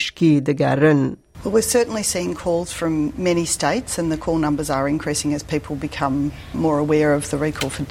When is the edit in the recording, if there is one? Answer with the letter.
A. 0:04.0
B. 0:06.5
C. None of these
B